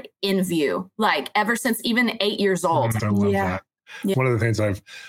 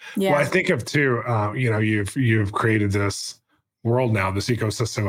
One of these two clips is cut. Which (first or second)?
first